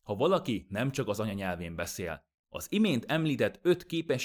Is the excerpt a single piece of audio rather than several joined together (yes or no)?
no